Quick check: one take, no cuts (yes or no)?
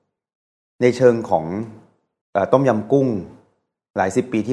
yes